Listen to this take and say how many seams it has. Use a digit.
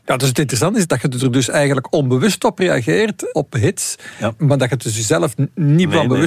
0